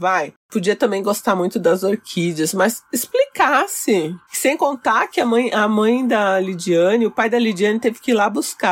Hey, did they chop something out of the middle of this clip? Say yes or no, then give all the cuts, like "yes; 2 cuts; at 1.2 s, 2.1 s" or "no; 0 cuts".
no; 0 cuts